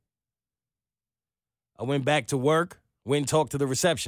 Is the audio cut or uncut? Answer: uncut